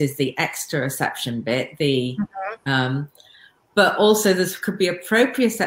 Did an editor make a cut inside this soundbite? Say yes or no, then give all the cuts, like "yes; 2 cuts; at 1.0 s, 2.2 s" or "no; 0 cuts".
no; 0 cuts